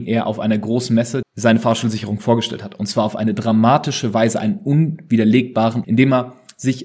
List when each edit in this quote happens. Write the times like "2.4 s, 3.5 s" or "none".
1.2 s, 5.8 s